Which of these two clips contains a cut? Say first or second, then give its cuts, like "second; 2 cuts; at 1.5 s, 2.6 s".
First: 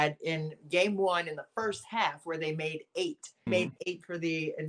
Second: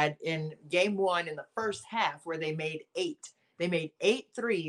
first; 1 cut; at 3.5 s